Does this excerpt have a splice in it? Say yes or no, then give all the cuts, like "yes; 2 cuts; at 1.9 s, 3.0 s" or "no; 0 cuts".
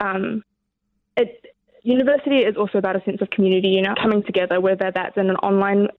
yes; 1 cut; at 3.9 s